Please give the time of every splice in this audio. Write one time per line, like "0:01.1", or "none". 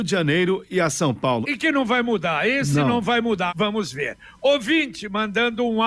0:01.4
0:03.5